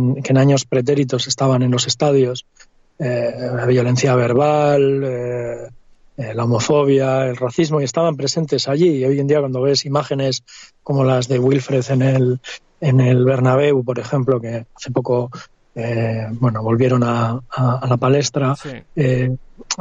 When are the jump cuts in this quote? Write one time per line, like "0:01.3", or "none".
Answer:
none